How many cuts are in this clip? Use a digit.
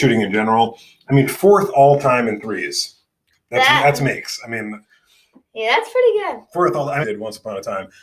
1